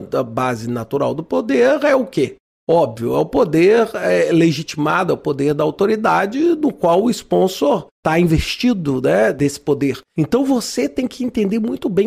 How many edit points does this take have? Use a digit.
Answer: 0